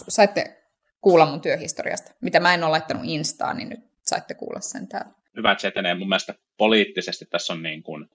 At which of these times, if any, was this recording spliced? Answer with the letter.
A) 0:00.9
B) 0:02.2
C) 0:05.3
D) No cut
C